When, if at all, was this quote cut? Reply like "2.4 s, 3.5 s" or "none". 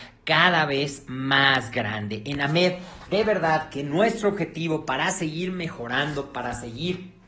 none